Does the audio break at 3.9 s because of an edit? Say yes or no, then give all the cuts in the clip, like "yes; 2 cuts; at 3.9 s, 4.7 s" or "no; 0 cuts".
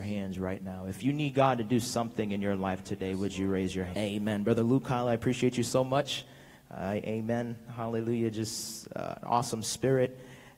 yes; 1 cut; at 3.9 s